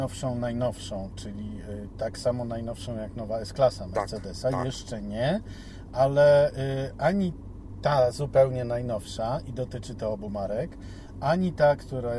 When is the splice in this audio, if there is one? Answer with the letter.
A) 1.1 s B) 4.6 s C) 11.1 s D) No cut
D